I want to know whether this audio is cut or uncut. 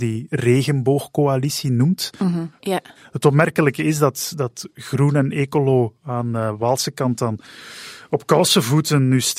cut